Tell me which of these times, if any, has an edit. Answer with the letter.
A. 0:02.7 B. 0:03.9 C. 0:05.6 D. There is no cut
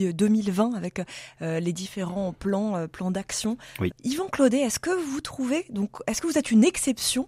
B